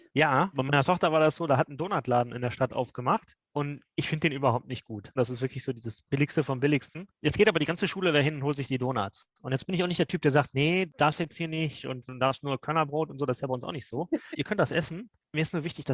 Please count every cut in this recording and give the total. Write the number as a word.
two